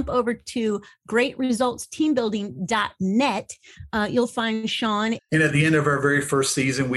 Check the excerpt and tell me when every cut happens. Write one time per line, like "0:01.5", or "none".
0:05.2